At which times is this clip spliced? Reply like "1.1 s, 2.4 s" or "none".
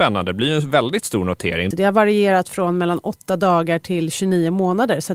1.7 s